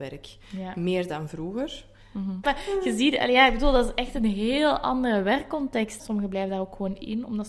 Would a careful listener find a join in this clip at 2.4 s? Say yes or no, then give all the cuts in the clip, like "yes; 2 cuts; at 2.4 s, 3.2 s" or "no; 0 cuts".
yes; 2 cuts; at 2.4 s, 6.0 s